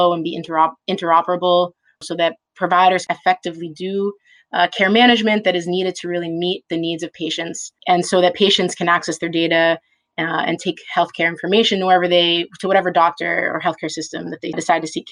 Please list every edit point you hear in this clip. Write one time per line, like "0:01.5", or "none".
none